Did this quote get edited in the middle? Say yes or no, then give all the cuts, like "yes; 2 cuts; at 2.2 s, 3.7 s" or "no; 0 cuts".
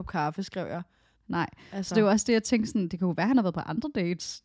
yes; 1 cut; at 1.2 s